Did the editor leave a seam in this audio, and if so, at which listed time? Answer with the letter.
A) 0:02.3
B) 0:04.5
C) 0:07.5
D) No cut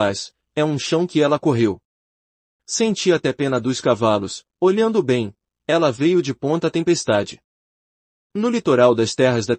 D